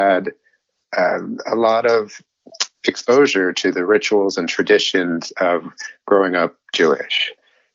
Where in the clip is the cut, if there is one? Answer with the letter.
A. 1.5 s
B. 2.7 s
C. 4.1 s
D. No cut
B